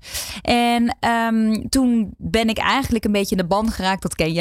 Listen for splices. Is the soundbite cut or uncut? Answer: uncut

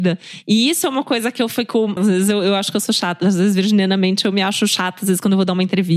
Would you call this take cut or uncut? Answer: cut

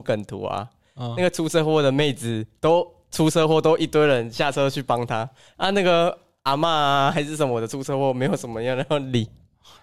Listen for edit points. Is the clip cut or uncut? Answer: uncut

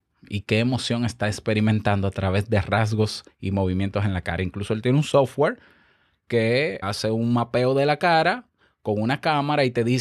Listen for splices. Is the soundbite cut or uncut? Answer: cut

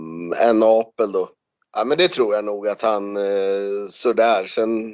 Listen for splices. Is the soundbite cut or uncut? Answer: cut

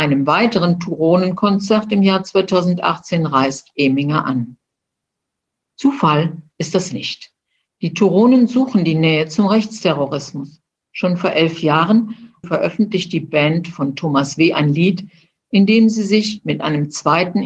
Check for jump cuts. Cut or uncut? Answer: cut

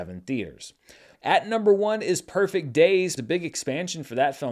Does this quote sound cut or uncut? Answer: cut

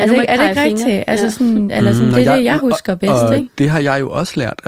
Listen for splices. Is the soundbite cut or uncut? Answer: uncut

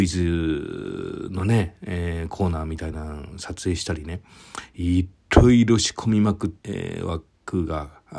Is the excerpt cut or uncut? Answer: cut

